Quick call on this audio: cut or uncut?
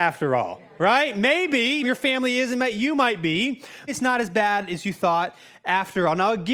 cut